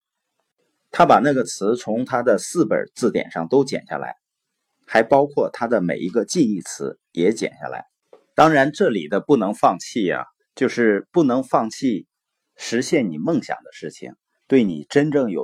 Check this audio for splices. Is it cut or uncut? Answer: uncut